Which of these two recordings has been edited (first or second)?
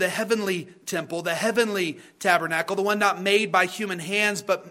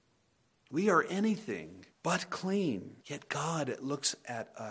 second